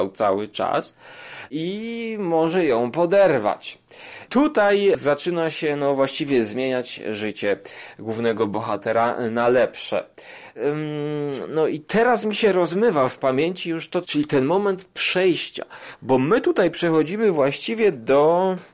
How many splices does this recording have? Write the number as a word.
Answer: one